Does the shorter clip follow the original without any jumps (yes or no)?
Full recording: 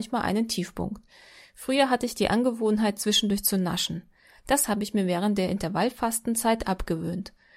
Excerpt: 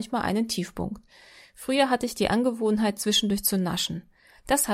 yes